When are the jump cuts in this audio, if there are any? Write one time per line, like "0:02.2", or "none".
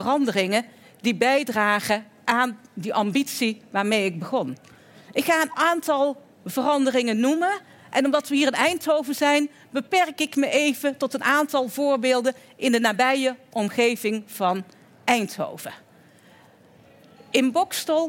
none